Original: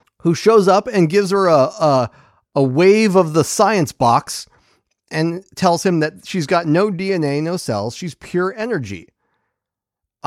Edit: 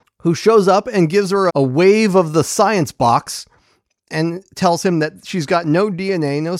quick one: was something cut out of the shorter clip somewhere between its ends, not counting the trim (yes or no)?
yes